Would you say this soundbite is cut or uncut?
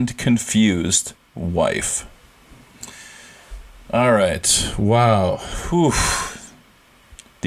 uncut